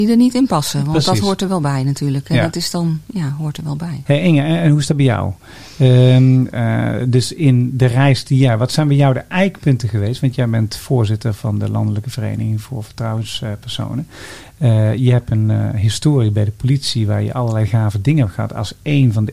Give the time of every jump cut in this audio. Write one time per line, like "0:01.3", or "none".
0:04.0